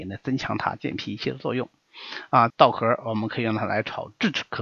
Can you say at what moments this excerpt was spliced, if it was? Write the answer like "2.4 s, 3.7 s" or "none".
2.5 s

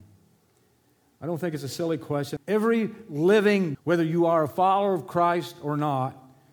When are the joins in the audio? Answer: 2.4 s, 3.7 s

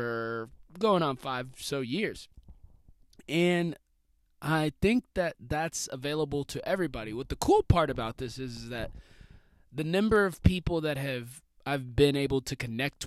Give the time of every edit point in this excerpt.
none

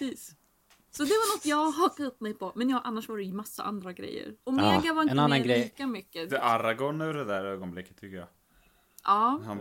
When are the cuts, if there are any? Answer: 4.4 s, 6.3 s

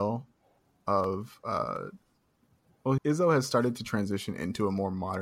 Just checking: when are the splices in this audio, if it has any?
3.0 s

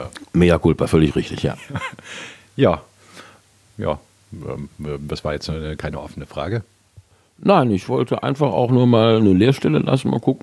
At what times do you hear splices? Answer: none

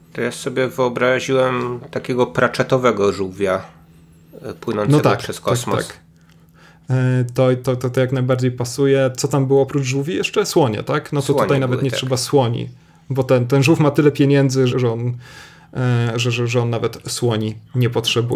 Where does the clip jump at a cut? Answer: 14.7 s

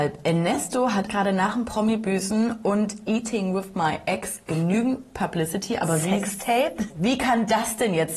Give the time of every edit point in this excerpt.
1.1 s, 6.9 s

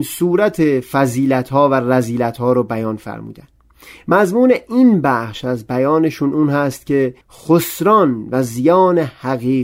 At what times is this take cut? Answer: 7.2 s

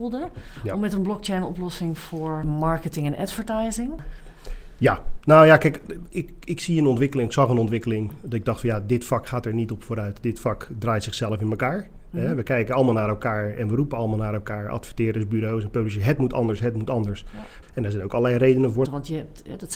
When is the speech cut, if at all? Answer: 6.1 s, 17.6 s, 18.8 s

